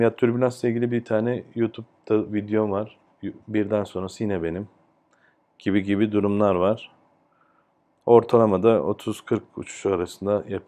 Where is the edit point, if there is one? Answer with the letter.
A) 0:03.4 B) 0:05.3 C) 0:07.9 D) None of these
A